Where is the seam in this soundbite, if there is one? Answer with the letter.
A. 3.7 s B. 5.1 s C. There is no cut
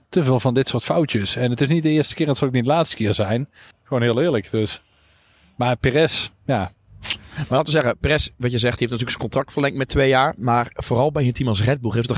A